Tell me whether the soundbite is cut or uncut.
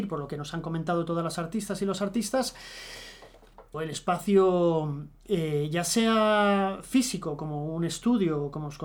cut